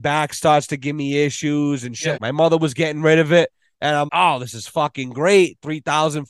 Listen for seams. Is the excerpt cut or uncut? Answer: cut